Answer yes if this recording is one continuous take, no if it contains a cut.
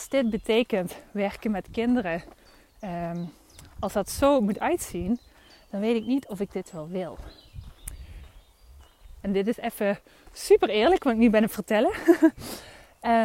no